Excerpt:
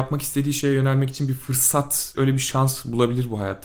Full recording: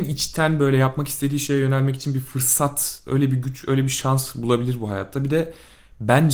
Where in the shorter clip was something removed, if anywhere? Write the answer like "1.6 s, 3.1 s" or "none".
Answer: 2.1 s